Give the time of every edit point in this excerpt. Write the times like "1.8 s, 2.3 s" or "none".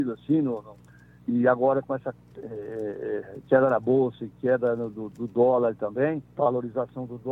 none